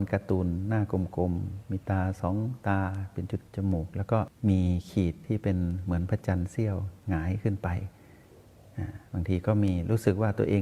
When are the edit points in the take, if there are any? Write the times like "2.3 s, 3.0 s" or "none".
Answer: 3.5 s